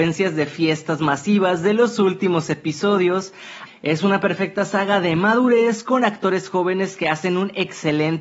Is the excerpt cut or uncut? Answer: cut